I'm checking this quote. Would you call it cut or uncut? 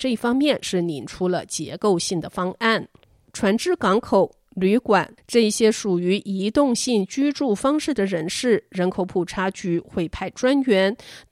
cut